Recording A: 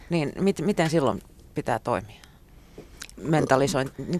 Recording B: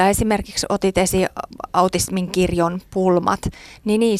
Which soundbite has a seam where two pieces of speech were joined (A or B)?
A